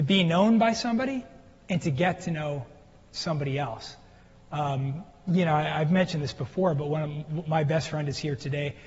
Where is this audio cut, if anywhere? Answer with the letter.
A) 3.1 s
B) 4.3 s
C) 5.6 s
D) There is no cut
D